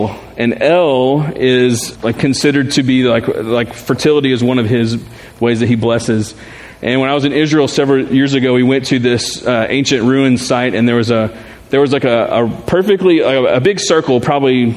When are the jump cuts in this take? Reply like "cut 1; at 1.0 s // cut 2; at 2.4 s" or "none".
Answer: cut 1; at 1.9 s